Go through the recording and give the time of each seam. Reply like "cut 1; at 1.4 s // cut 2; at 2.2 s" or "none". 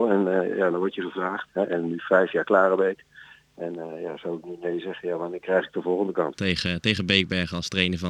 cut 1; at 1.5 s // cut 2; at 6.3 s